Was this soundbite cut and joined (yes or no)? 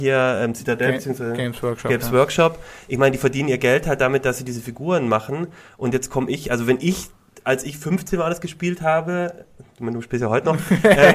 no